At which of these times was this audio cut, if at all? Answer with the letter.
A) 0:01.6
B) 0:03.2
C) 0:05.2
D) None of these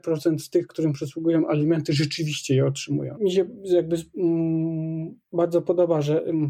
B